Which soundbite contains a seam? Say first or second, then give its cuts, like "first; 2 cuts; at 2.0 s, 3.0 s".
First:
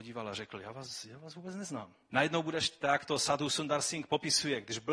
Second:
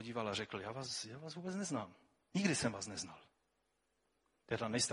first; 1 cut; at 2.1 s